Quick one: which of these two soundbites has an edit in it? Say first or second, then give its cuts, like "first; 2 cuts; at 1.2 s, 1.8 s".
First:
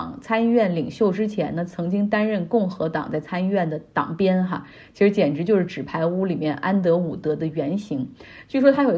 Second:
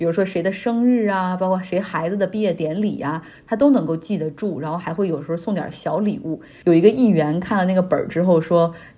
second; 1 cut; at 6.6 s